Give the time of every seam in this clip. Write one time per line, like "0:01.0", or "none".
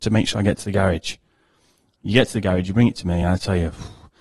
none

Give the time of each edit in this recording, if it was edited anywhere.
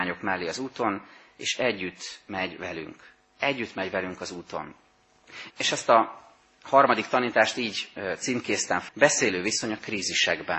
0:05.5
0:08.9

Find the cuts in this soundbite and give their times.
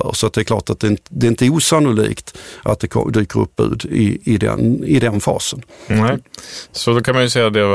none

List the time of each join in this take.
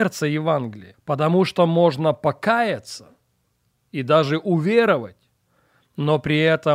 0:00.9

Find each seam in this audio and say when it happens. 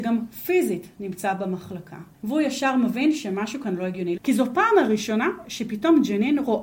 0:02.1
0:04.2

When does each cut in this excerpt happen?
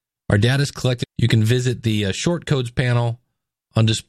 0:01.0

